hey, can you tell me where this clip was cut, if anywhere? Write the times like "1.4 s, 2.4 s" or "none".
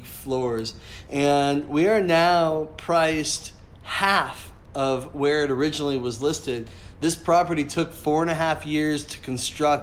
1.1 s